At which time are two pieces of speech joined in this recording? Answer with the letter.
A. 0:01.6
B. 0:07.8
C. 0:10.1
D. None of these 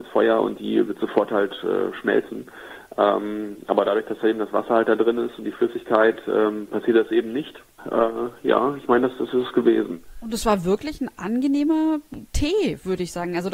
B